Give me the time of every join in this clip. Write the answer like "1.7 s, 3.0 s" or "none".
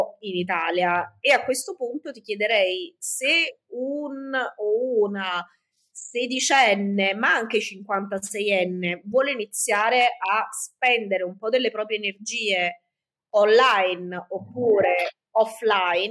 none